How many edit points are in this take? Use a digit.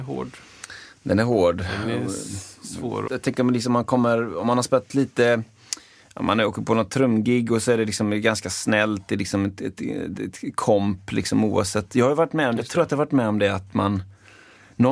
1